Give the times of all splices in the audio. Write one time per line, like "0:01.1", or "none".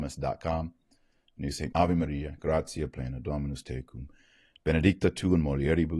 0:01.7